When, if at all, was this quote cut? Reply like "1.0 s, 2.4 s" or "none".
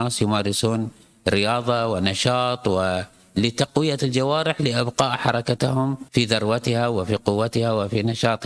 6.1 s